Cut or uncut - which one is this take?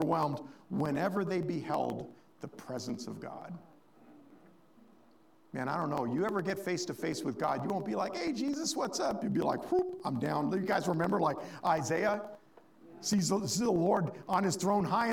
uncut